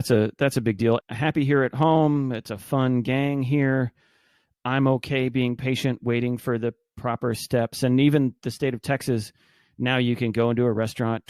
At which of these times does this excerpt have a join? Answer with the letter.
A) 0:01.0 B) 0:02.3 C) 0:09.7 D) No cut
A